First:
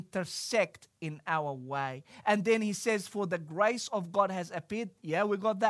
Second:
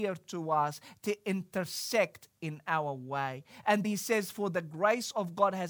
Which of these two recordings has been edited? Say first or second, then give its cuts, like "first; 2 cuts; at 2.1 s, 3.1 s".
second; 1 cut; at 3.8 s